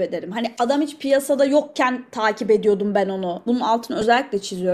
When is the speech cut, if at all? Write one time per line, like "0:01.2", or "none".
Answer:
0:03.5